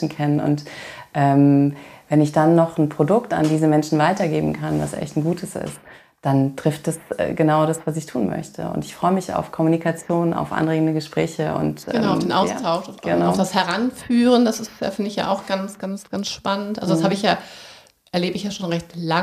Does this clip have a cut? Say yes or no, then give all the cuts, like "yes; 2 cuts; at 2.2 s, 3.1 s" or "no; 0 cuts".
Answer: no; 0 cuts